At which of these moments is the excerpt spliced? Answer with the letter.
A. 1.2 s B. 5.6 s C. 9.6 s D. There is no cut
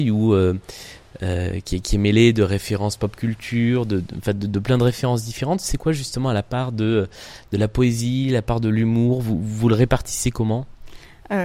D